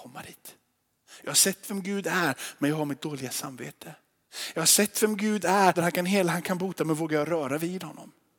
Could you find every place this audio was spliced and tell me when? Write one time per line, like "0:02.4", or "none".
0:05.7